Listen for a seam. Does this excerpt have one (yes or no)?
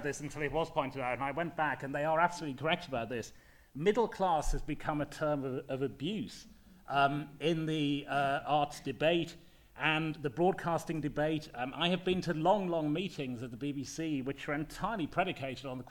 no